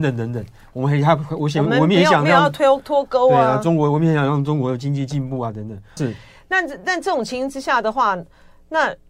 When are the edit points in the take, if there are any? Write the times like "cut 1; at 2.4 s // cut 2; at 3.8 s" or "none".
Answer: cut 1; at 6.0 s

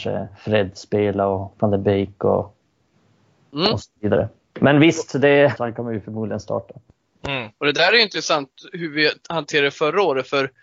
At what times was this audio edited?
cut 1; at 5.6 s

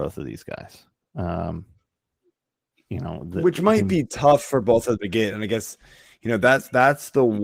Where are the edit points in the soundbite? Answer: none

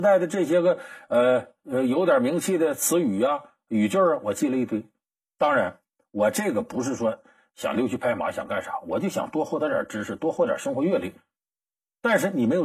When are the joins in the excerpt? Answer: none

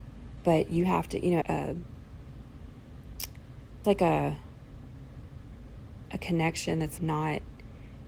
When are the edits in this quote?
cut 1; at 1.4 s // cut 2; at 3.8 s // cut 3; at 7.0 s

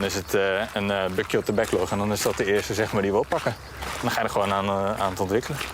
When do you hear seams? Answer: none

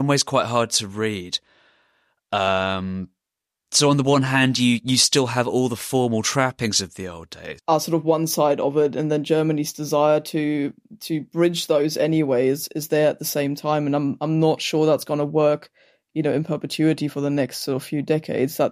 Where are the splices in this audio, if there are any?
cut 1; at 7.6 s

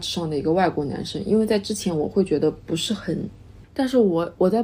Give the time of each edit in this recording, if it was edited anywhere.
cut 1; at 3.6 s

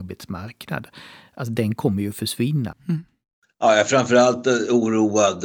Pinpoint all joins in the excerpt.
cut 1; at 2.7 s

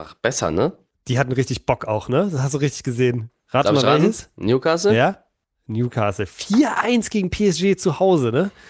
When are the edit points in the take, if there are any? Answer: cut 1; at 3.4 s

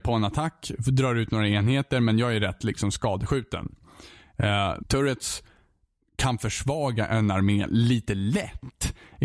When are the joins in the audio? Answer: cut 1; at 4.8 s

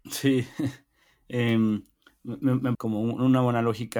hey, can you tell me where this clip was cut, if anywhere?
cut 1; at 2.7 s

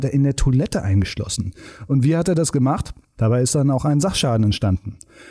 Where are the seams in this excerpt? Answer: cut 1; at 3.2 s

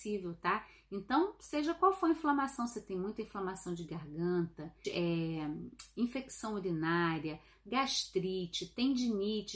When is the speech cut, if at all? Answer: cut 1; at 4.8 s

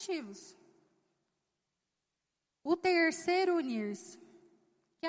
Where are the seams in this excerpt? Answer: none

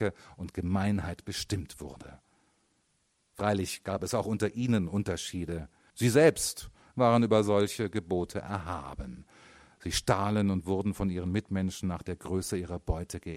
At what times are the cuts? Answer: cut 1; at 5.9 s

